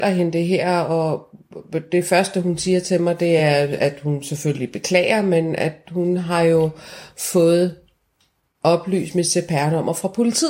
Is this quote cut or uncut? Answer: uncut